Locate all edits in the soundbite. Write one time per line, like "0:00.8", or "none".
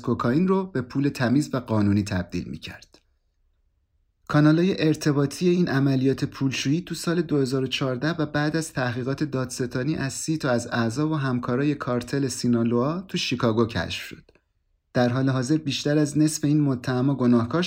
none